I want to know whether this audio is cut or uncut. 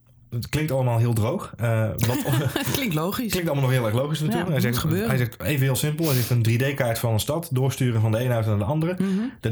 uncut